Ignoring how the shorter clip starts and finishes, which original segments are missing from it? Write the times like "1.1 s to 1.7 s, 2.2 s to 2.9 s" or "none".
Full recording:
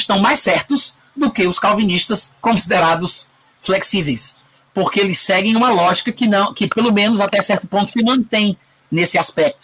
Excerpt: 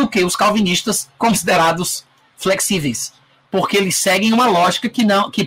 none